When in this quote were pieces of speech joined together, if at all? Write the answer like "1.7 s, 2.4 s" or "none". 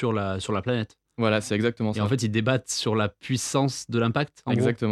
none